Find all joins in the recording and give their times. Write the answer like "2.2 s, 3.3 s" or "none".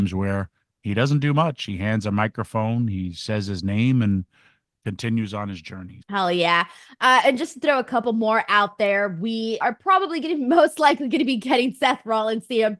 6.0 s, 9.6 s